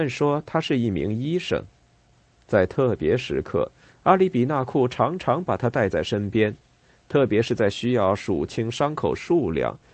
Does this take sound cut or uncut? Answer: uncut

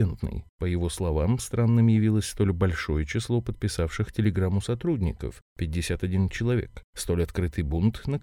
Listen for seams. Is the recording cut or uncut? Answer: cut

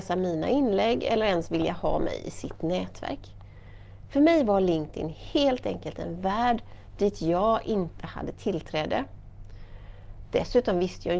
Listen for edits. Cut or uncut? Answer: uncut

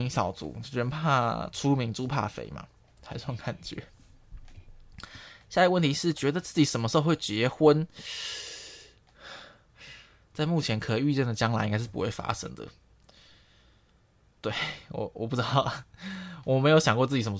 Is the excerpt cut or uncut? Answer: uncut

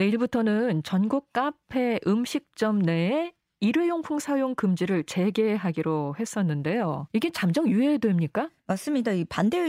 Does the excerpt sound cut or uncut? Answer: cut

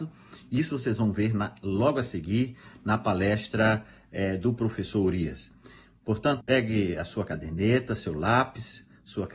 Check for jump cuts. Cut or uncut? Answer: cut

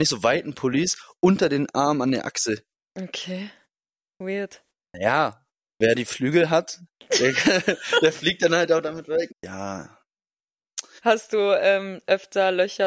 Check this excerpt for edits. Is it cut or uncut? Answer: cut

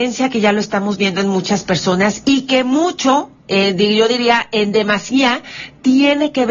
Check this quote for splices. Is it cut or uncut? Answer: cut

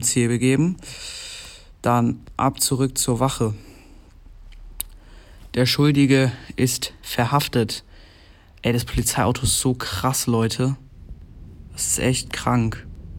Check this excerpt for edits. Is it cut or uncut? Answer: uncut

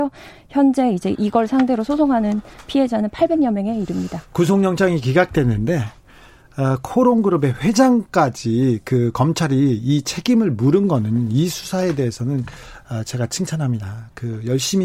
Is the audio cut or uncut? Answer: uncut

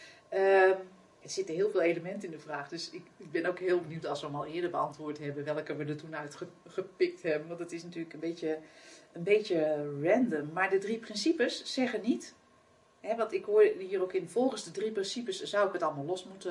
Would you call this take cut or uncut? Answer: uncut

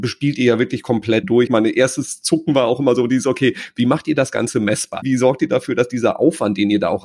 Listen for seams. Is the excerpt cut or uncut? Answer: cut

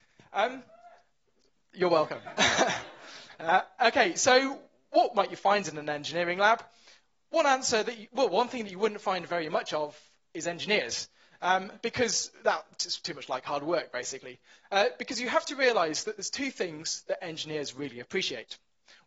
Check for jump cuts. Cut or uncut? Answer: uncut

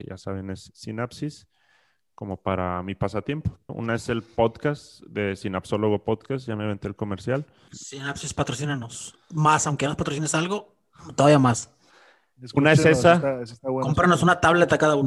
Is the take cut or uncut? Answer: cut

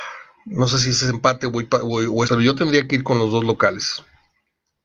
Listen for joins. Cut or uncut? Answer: cut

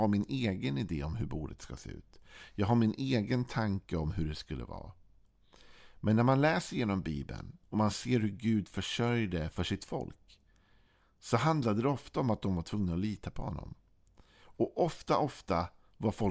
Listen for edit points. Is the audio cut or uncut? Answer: cut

